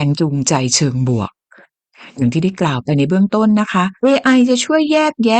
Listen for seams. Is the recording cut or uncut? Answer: cut